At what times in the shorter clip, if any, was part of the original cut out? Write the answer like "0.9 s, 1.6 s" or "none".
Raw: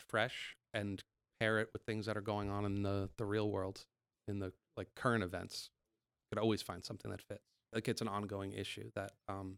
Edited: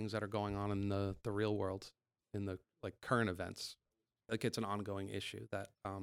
4.2 s